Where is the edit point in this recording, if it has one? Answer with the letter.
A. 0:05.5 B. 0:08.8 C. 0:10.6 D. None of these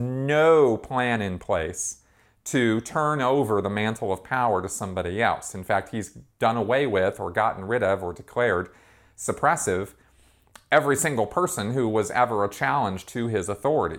D